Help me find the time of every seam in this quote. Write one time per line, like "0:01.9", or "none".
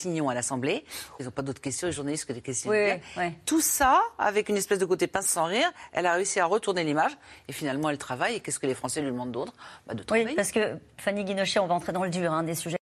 0:01.2

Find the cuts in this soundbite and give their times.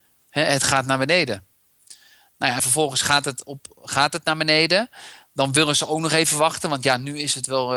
none

